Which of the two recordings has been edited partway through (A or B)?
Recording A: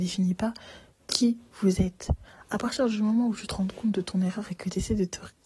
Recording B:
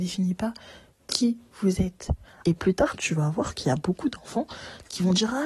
B